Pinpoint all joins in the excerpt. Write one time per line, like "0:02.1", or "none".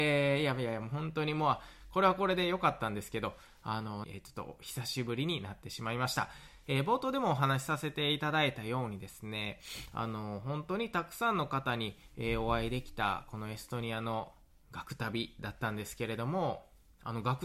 0:04.0
0:06.6